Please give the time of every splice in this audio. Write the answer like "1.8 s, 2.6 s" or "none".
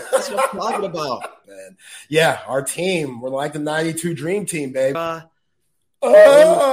1.4 s, 4.9 s